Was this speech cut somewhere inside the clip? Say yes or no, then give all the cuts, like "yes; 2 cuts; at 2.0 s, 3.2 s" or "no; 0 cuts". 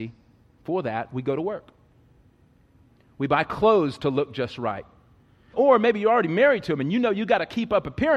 yes; 1 cut; at 5.5 s